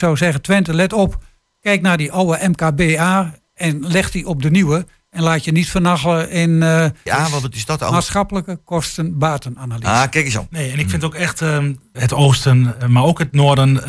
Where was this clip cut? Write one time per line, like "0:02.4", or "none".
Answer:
0:07.1
0:10.5
0:11.9

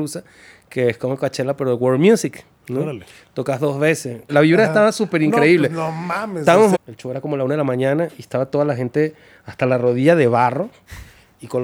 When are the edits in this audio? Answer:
0:04.3
0:06.7

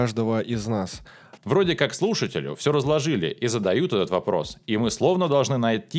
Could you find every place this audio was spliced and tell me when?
0:01.4

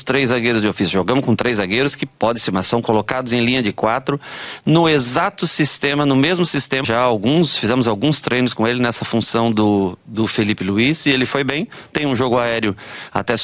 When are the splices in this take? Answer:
0:06.8

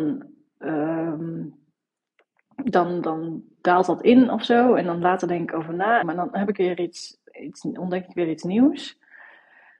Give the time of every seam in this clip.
0:03.0
0:06.0

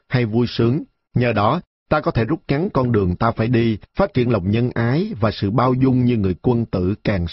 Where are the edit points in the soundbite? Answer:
0:01.1
0:03.8

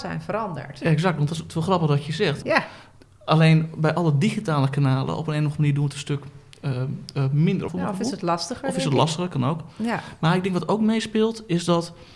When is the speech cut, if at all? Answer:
0:02.4
0:07.7

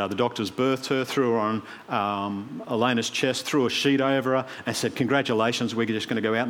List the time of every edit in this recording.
none

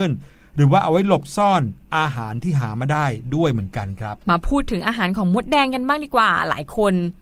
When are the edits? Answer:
0:04.2

